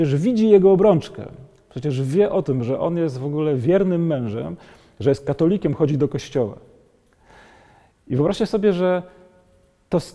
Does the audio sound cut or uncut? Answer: uncut